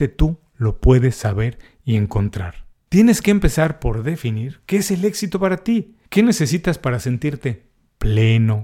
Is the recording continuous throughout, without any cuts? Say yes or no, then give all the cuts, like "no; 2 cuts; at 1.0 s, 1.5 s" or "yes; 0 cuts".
yes; 0 cuts